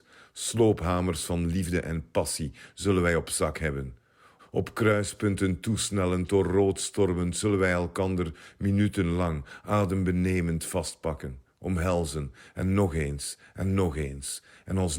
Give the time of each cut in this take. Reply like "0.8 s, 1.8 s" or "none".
4.4 s